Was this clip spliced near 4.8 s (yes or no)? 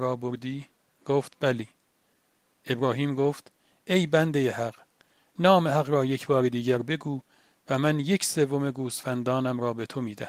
no